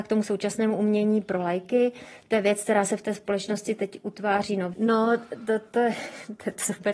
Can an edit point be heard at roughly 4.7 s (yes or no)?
yes